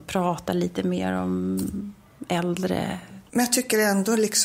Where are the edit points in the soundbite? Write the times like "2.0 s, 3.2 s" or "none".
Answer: 3.3 s